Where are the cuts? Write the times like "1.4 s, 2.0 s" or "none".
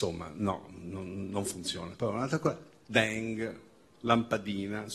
1.9 s

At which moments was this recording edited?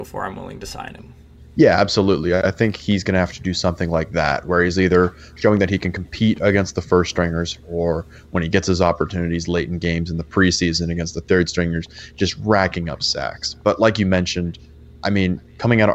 none

